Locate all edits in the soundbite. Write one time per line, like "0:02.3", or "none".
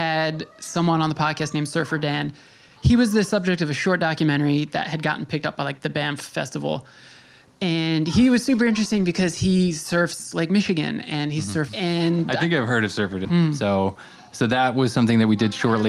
0:11.7
0:13.2